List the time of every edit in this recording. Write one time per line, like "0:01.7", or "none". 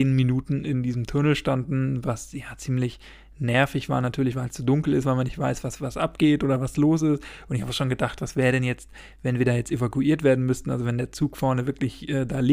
none